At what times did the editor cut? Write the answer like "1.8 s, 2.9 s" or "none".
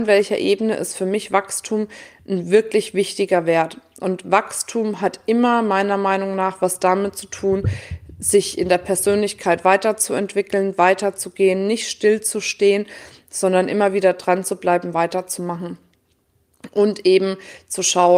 none